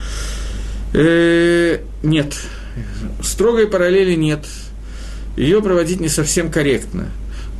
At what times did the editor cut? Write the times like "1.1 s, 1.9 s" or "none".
none